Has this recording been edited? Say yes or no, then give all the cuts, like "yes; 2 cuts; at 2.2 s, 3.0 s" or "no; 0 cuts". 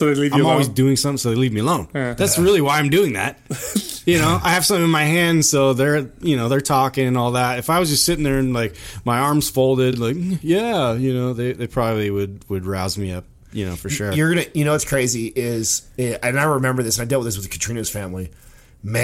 no; 0 cuts